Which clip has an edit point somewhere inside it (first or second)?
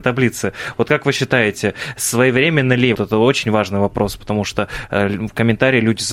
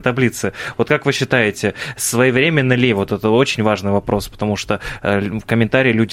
first